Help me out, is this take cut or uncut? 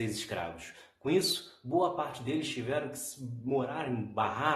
uncut